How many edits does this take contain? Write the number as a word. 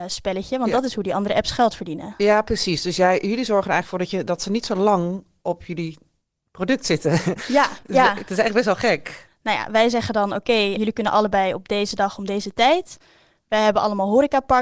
three